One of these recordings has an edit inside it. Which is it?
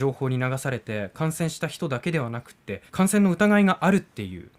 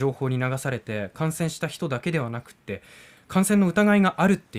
first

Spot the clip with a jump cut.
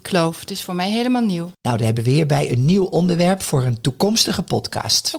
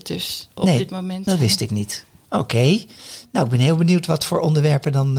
first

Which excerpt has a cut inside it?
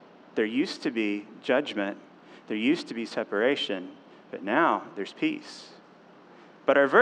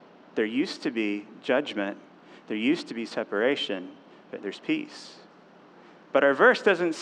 second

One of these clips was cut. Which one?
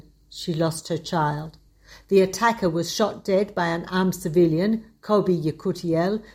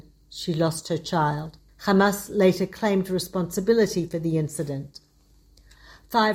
second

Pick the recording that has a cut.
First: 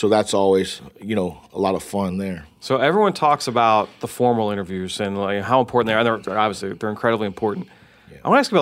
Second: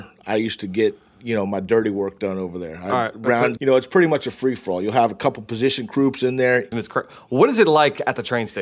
second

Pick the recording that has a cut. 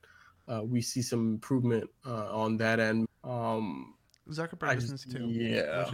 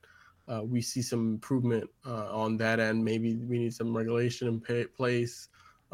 first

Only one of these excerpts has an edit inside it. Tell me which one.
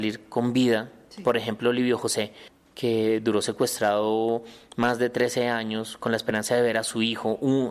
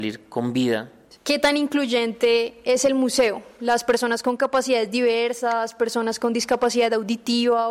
second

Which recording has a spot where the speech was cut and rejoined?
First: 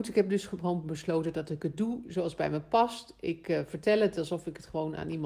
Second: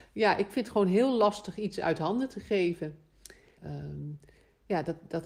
second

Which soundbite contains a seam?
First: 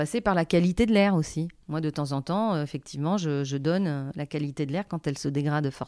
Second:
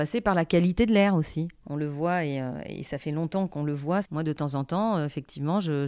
second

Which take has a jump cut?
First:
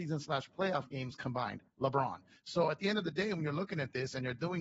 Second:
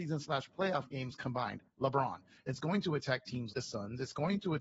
second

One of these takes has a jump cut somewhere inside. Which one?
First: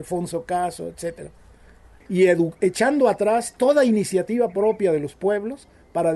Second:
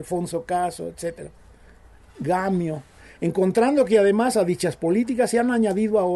first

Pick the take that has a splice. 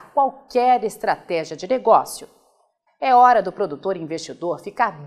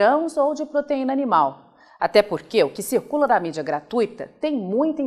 first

